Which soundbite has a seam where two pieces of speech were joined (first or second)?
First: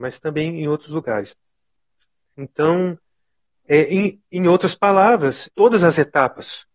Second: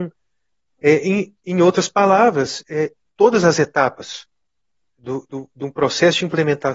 first